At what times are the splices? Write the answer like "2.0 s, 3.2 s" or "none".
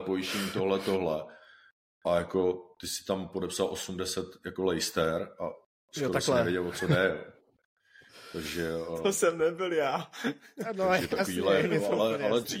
none